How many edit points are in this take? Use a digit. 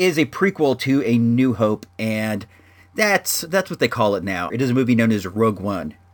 1